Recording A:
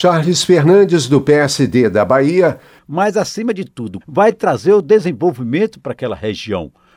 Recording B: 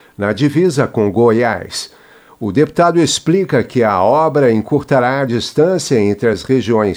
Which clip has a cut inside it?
A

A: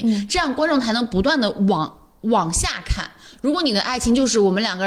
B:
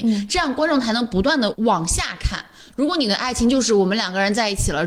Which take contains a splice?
B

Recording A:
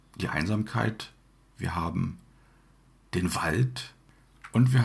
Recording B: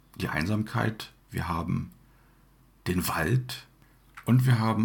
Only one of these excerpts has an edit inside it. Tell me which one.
B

